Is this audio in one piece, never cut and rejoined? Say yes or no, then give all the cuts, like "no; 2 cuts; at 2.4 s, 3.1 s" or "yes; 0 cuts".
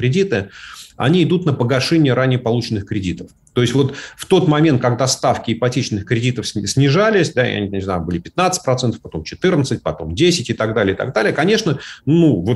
yes; 0 cuts